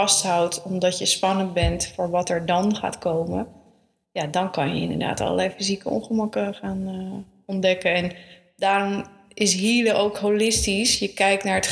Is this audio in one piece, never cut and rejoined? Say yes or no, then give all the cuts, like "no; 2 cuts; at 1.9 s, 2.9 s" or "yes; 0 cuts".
yes; 0 cuts